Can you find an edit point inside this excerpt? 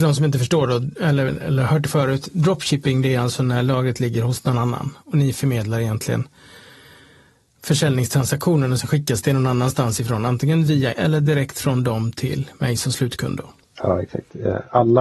yes; 2 cuts; at 1.3 s, 10.9 s

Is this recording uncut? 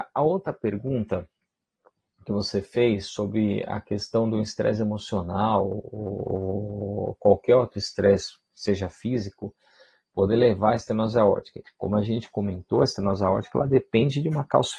no; 1 cut; at 11.6 s

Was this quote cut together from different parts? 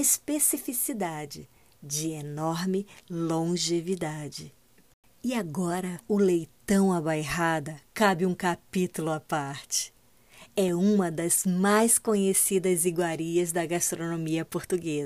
yes; 1 cut; at 6.0 s

